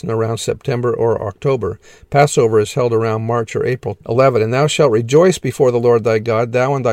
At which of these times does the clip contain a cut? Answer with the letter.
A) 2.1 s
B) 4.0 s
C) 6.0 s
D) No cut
B